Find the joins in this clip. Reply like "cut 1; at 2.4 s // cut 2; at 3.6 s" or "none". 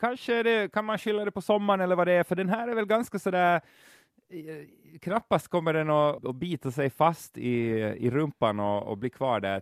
cut 1; at 6.2 s